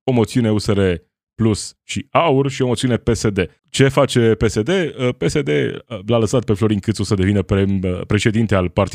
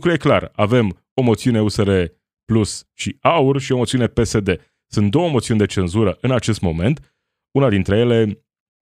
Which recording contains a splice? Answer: first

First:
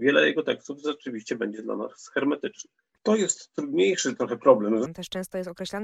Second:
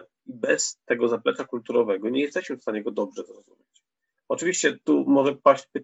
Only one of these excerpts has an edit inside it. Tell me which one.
first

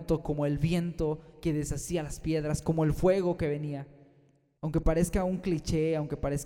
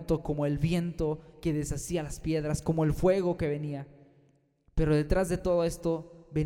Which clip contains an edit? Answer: first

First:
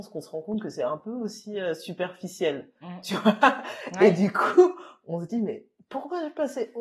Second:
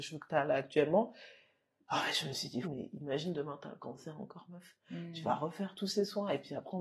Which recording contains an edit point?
second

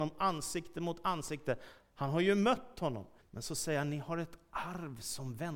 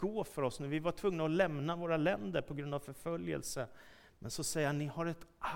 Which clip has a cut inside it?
first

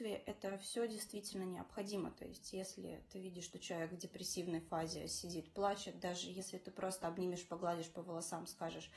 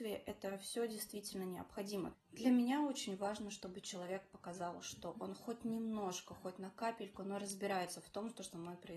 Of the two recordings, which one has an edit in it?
second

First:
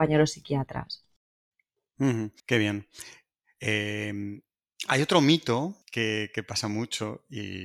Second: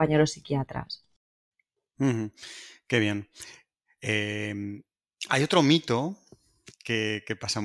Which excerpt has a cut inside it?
first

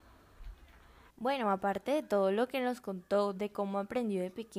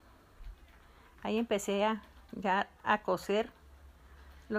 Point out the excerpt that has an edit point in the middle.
first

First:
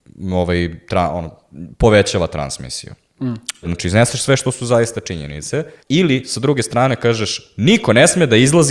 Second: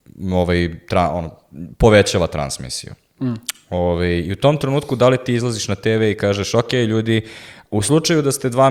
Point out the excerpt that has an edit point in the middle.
first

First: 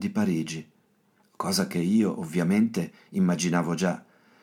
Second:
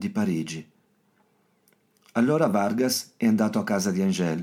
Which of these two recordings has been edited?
first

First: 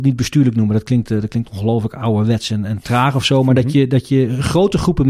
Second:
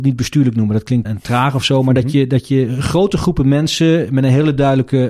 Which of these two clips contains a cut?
second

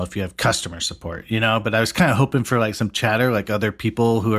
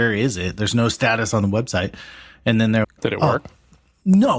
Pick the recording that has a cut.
second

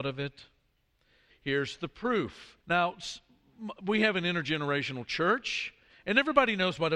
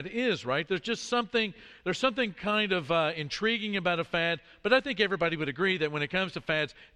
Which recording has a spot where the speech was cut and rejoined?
first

